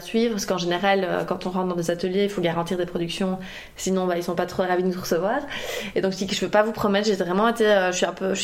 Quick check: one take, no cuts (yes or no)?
yes